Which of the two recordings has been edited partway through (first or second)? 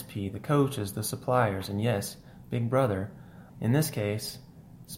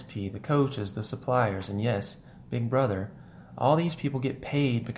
first